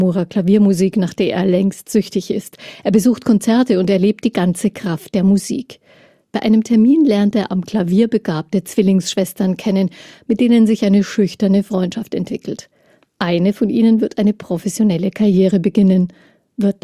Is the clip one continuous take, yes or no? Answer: yes